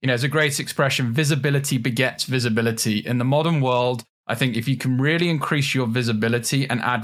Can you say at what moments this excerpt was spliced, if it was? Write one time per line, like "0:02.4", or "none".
none